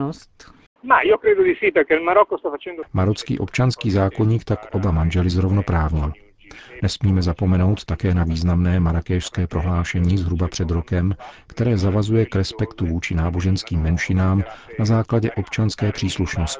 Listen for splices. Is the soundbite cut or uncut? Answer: cut